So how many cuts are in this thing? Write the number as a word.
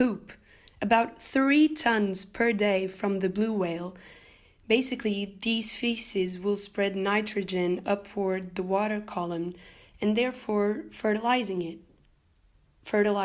zero